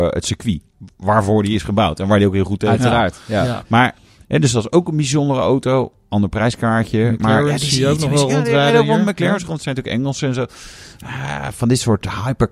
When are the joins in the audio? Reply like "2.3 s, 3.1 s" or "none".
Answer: none

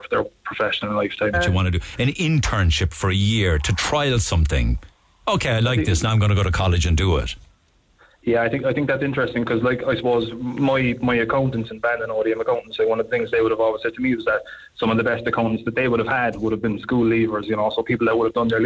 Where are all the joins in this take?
1.3 s

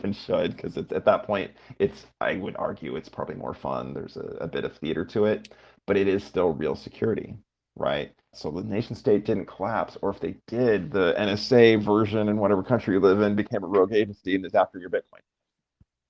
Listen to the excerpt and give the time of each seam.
8.3 s

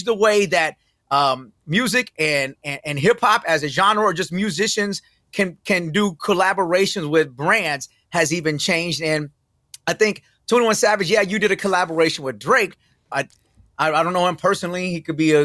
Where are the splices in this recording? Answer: 13.1 s

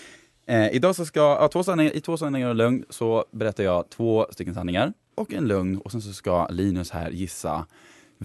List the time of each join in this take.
5.1 s

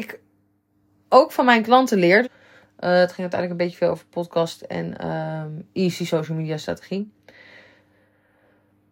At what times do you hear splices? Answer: 2.2 s

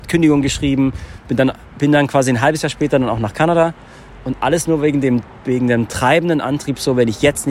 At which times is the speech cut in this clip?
none

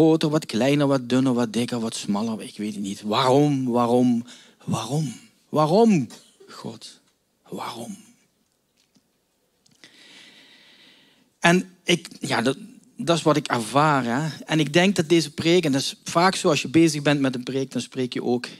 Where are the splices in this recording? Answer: none

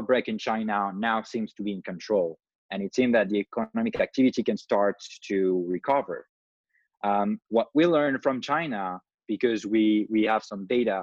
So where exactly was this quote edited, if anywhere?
none

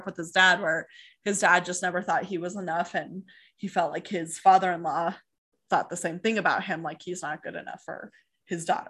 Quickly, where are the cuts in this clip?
none

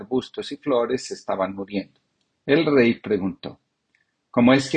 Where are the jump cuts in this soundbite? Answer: 2.3 s

